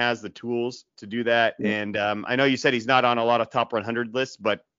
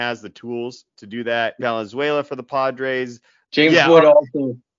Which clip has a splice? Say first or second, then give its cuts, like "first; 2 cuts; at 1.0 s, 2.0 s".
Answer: second; 2 cuts; at 1.6 s, 3.4 s